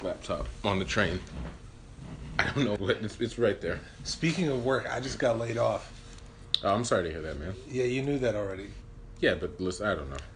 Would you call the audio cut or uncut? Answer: cut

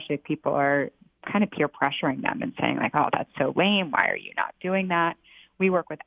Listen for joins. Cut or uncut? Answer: uncut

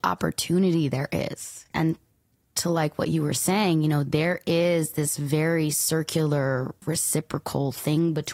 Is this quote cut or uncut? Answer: uncut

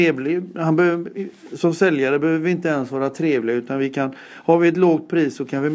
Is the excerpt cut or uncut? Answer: uncut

